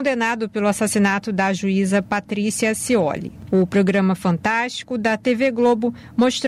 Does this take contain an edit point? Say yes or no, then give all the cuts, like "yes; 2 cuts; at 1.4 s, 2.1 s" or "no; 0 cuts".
yes; 1 cut; at 3.5 s